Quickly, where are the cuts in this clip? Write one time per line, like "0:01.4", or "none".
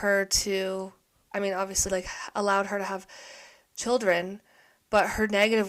0:01.9